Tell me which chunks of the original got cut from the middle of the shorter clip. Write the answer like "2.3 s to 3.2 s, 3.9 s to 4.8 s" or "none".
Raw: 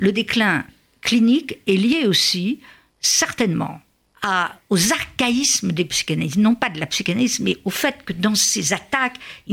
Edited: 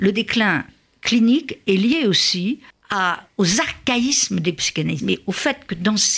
2.7 s to 4.0 s, 6.3 s to 7.4 s